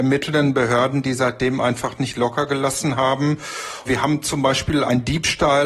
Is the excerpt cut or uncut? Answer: uncut